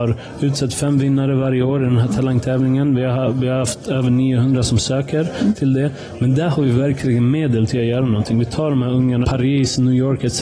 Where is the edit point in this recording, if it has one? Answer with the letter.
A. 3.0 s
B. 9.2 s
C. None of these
B